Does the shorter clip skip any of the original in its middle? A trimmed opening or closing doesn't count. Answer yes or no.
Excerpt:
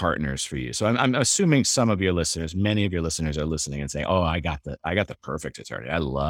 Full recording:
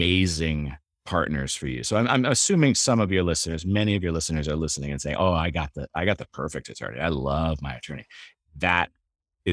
no